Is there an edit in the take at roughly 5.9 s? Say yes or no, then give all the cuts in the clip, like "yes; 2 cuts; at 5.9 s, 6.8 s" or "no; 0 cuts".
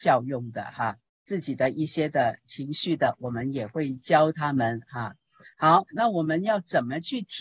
yes; 2 cuts; at 1.1 s, 5.9 s